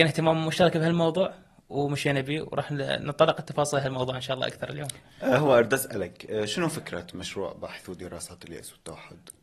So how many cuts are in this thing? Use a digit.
0